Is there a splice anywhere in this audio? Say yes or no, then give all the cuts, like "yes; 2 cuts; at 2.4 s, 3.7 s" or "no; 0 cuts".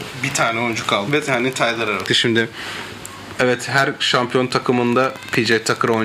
yes; 2 cuts; at 1.1 s, 2.1 s